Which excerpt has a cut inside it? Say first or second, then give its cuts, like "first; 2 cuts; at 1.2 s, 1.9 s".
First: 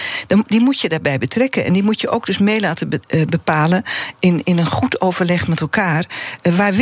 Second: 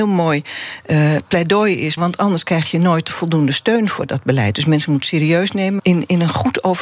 second; 2 cuts; at 2.0 s, 5.8 s